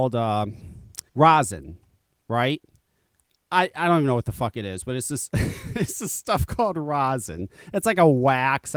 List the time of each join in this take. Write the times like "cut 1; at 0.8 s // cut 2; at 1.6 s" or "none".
cut 1; at 1.1 s